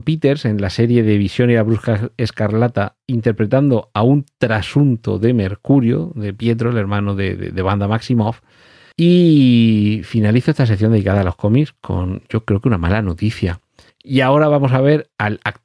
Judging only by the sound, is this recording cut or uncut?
cut